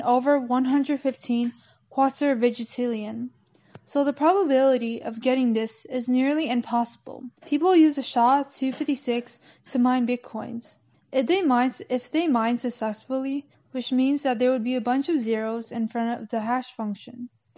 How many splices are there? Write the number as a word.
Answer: three